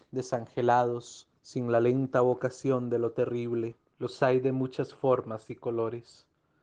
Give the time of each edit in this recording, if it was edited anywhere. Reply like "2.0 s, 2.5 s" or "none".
3.9 s